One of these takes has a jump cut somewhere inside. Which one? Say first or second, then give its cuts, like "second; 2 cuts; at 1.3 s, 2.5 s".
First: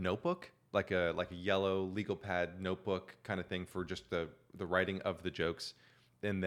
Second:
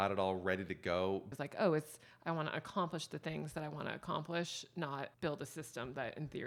second; 2 cuts; at 1.3 s, 5.1 s